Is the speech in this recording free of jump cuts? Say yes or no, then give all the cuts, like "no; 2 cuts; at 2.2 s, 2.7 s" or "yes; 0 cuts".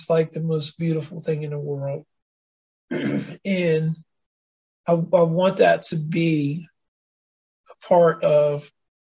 no; 1 cut; at 2.5 s